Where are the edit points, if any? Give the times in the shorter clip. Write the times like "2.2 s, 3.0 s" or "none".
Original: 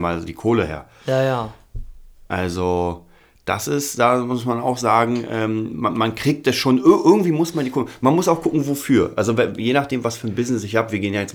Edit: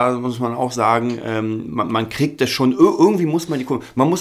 none